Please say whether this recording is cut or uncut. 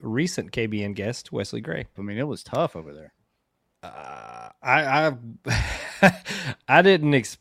cut